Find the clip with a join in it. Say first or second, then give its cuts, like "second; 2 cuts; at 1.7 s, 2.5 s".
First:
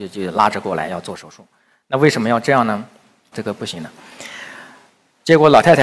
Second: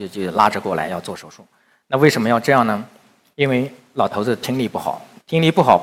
first; 1 cut; at 3.3 s